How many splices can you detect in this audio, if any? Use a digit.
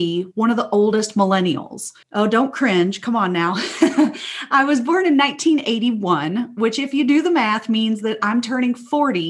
1